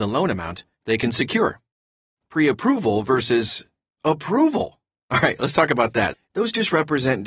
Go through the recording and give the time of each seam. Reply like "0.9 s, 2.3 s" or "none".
6.1 s